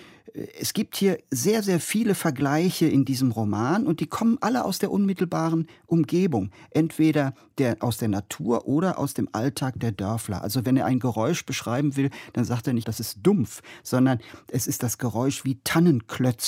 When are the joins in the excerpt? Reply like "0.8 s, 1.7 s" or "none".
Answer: 12.8 s